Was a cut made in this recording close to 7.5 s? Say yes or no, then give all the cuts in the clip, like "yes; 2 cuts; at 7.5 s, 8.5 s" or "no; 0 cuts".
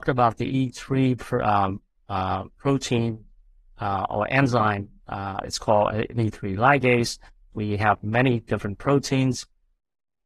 yes; 1 cut; at 7.5 s